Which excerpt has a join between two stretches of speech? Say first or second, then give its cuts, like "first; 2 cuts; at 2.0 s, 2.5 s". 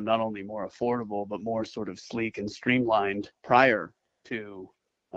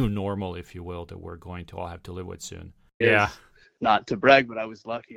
second; 1 cut; at 3.0 s